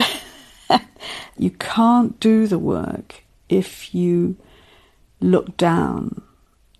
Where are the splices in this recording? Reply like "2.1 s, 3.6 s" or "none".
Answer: none